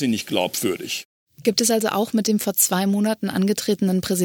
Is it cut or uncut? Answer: uncut